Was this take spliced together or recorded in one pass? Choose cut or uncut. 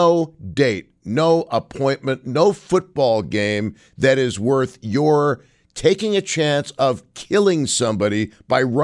uncut